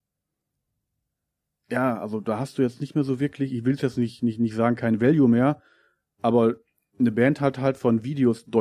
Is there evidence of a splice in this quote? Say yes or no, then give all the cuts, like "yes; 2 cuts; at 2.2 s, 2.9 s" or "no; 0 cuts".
no; 0 cuts